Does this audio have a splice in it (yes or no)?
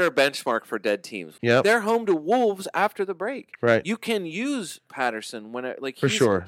yes